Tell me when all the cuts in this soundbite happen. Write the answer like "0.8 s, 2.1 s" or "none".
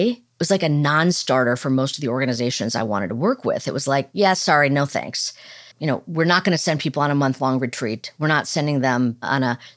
5.7 s